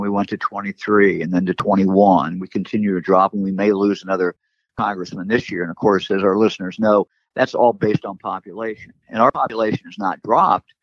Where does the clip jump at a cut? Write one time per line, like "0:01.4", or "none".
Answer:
none